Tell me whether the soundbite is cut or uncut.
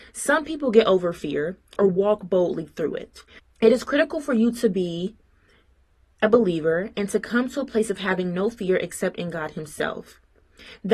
cut